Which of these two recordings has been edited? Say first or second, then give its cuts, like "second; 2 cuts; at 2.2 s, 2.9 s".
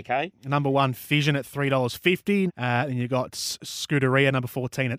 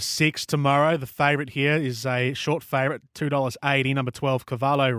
first; 1 cut; at 2.5 s